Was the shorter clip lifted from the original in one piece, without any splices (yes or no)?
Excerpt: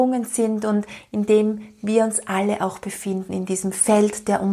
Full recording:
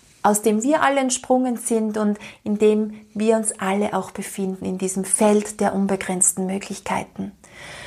yes